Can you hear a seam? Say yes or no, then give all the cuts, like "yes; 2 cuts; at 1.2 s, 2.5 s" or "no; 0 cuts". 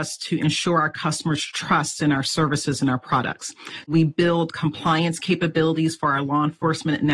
yes; 1 cut; at 3.8 s